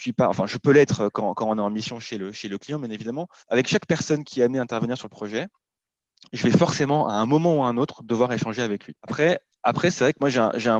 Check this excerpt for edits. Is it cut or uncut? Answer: cut